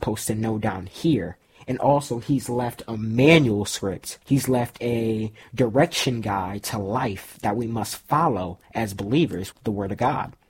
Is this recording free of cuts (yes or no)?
no